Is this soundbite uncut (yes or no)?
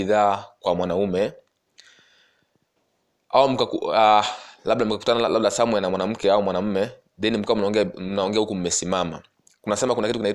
yes